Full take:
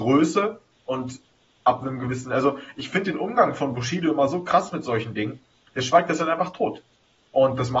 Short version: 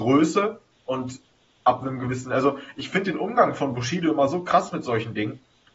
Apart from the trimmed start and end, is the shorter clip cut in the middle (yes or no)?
no